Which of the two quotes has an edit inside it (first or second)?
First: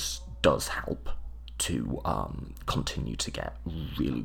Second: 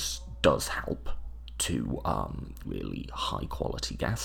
second